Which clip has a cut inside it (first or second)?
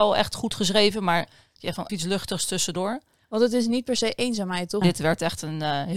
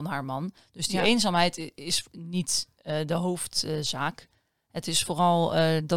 first